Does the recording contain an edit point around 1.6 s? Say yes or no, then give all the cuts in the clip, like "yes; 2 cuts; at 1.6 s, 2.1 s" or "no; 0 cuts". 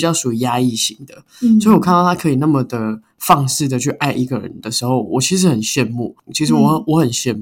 no; 1 cut; at 6.3 s